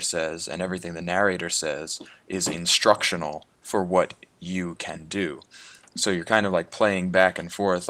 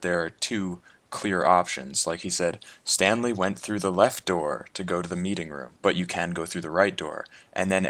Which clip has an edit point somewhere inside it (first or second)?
second